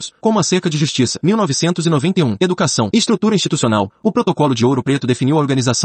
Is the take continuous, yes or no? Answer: no